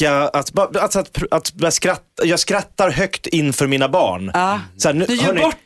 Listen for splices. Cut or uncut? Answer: uncut